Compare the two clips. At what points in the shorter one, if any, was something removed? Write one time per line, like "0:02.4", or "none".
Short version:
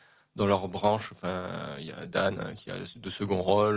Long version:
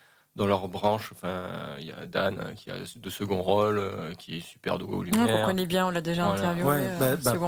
none